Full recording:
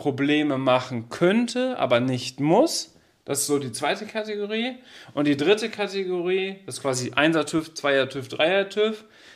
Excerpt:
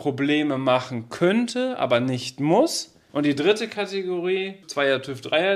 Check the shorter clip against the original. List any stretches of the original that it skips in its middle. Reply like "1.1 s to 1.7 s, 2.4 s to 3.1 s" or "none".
3.1 s to 5.1 s, 6.6 s to 7.7 s